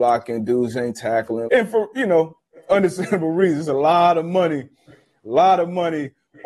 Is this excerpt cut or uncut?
cut